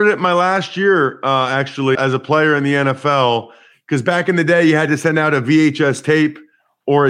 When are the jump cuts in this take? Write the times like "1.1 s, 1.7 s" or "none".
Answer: 1.9 s